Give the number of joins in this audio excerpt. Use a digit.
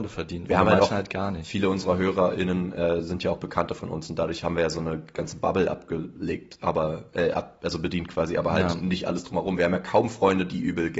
0